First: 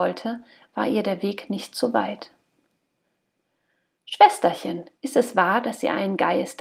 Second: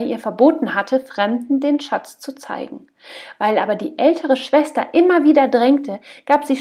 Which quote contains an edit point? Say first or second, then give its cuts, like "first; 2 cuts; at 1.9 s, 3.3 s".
first; 1 cut; at 5.0 s